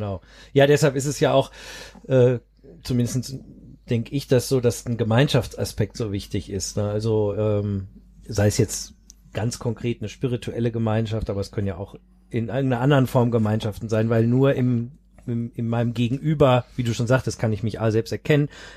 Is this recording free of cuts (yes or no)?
yes